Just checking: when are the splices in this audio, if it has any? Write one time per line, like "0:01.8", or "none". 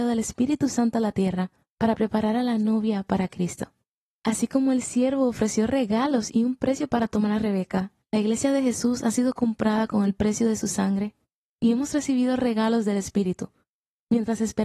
none